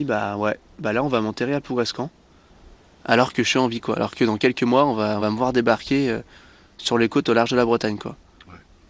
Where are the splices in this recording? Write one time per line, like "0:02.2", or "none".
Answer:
none